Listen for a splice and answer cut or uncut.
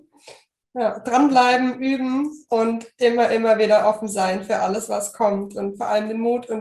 uncut